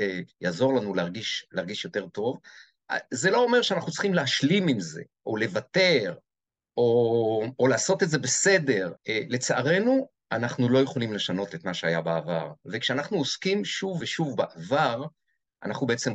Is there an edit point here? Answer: yes; 2 cuts; at 9.0 s, 14.0 s

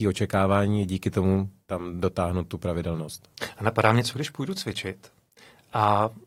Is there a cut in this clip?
no; 0 cuts

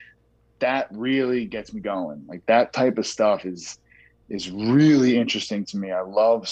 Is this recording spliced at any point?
no; 0 cuts

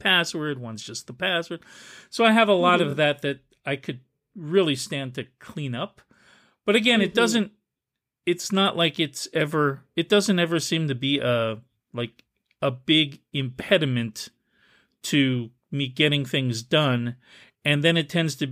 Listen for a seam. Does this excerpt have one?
no; 0 cuts

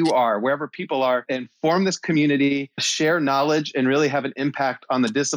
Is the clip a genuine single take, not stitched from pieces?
yes; 0 cuts

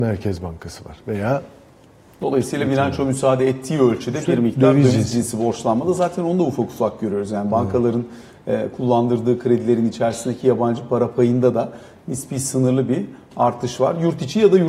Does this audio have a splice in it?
no; 0 cuts

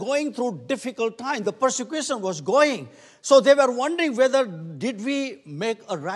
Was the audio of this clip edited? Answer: no; 0 cuts

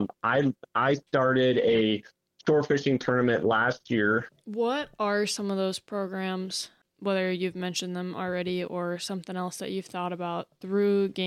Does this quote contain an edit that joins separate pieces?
yes; 1 cut; at 4.3 s

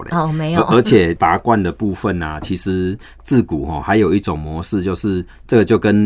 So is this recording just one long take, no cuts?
yes; 0 cuts

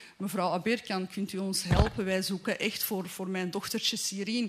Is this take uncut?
yes; 0 cuts

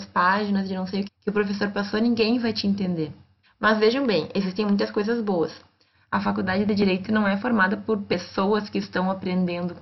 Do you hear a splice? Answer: yes; 3 cuts; at 1.1 s, 3.4 s, 5.9 s

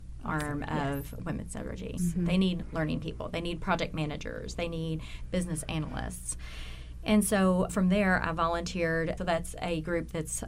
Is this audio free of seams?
no; 3 cuts; at 2.0 s, 7.7 s, 9.2 s

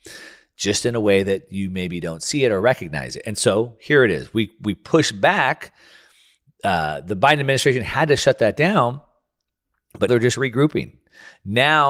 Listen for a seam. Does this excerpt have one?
yes; 1 cut; at 10.1 s

